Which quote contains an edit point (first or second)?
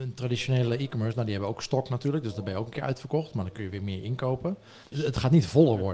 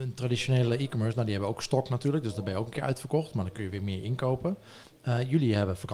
first